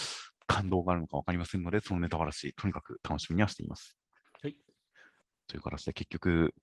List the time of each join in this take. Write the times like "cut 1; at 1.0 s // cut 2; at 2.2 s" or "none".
none